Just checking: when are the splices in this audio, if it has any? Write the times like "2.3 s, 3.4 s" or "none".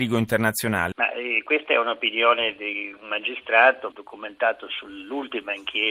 0.9 s, 3.9 s